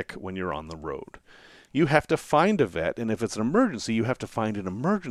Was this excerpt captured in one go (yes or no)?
no